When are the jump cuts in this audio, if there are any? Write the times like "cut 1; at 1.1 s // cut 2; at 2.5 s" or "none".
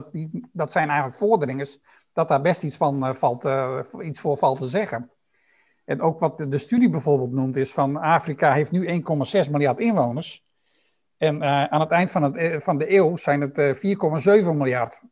none